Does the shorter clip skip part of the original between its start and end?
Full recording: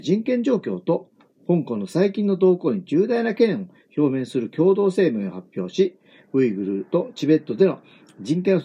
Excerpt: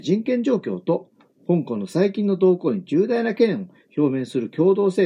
no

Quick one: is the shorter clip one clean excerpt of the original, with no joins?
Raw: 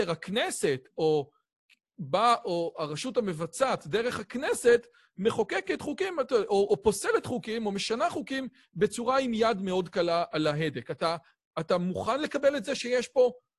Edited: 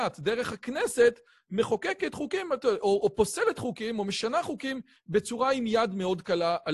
yes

